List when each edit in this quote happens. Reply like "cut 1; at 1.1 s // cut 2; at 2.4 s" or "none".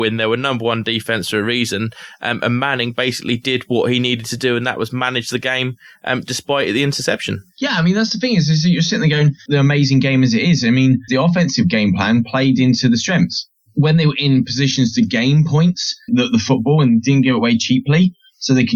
cut 1; at 9.5 s // cut 2; at 11.1 s // cut 3; at 16.1 s